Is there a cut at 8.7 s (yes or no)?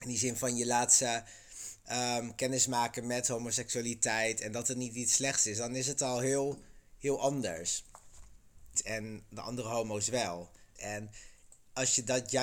yes